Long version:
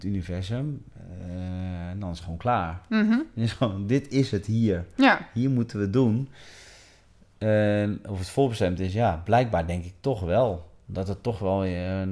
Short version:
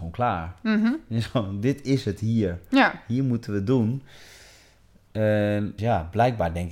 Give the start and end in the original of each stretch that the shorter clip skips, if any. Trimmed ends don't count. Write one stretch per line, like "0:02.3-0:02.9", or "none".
0:08.0-0:08.9